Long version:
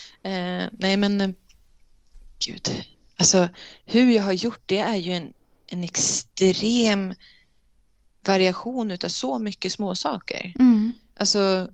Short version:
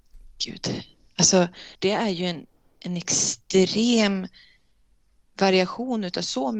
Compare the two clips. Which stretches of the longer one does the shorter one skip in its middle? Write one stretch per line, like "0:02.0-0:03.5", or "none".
0:03.8-0:04.6